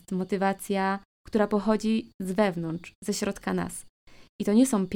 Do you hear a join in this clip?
no; 0 cuts

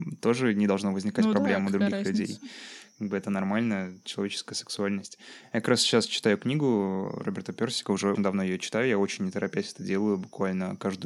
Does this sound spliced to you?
yes; 1 cut; at 8.2 s

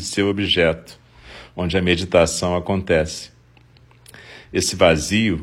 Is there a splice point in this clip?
no; 0 cuts

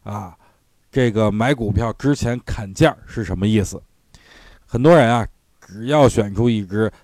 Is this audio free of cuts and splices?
yes; 0 cuts

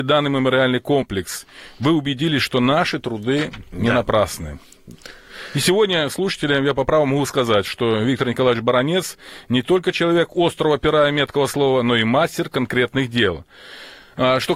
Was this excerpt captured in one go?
yes; 0 cuts

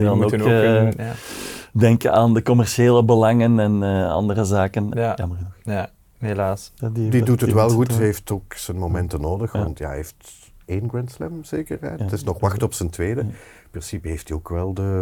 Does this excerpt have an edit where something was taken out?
yes; 2 cuts; at 4.9 s, 6.8 s

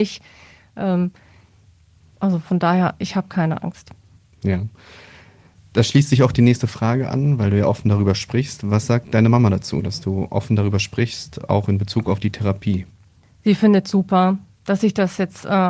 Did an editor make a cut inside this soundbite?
no; 0 cuts

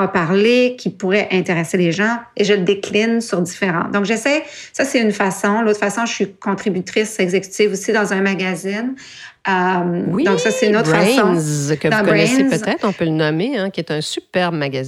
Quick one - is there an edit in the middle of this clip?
no; 0 cuts

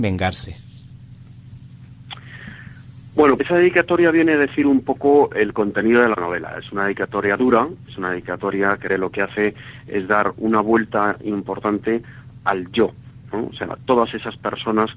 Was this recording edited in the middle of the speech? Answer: yes; 2 cuts; at 3.4 s, 8.9 s

